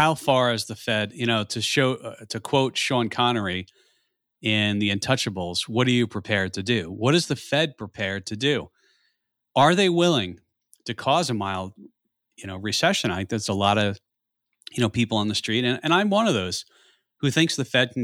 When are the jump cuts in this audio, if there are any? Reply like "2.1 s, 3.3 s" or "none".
none